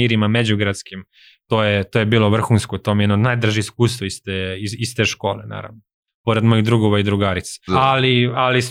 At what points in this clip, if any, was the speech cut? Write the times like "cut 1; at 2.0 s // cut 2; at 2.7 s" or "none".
cut 1; at 7.7 s